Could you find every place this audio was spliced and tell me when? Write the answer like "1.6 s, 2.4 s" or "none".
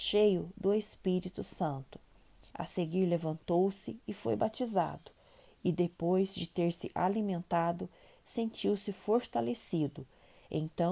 2.5 s